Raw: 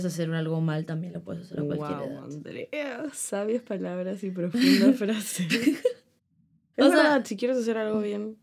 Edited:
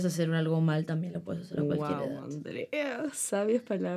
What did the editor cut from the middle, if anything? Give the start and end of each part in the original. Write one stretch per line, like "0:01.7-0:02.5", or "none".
none

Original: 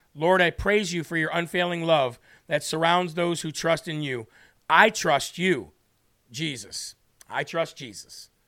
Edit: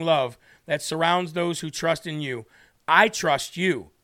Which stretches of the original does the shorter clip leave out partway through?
none

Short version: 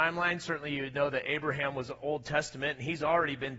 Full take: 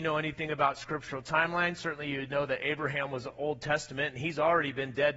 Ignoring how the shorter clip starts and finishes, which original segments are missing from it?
none

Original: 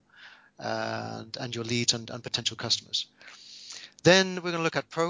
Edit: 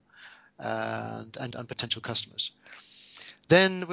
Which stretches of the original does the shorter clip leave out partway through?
0:01.5-0:02.1

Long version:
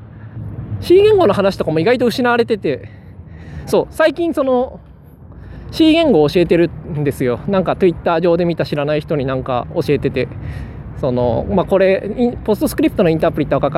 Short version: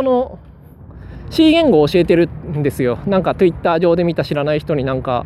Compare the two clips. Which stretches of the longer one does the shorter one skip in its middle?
none

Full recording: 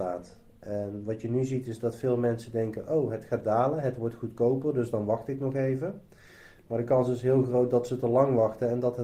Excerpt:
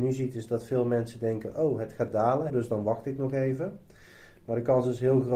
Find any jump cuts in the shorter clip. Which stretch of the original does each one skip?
0:03.8-0:04.7

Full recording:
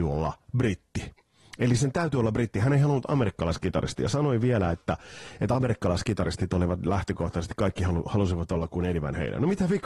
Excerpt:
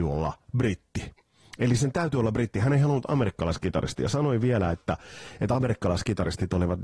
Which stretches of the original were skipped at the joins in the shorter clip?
none

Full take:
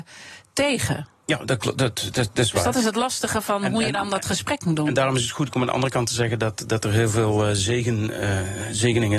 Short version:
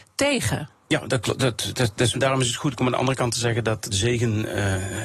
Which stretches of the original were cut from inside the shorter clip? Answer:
0:02.5-0:04.9
0:06.7-0:07.6

